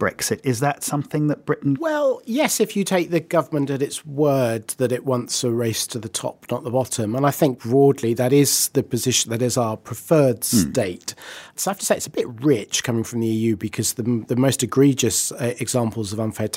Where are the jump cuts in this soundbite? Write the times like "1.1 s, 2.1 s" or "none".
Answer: 1.8 s